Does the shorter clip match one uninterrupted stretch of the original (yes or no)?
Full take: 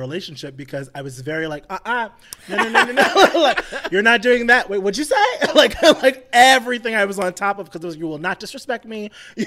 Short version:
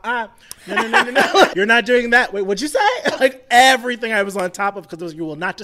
no